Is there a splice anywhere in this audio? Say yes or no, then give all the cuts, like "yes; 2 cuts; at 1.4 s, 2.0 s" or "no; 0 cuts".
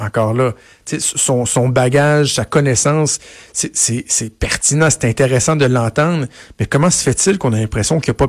no; 0 cuts